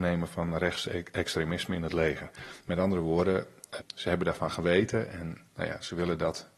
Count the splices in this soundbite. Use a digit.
1